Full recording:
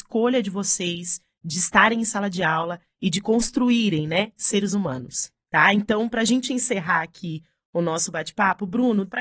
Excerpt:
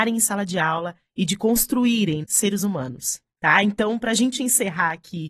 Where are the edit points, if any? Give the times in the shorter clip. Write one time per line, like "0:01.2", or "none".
0:02.2